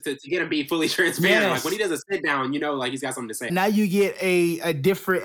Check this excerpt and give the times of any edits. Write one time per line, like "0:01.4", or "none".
0:03.5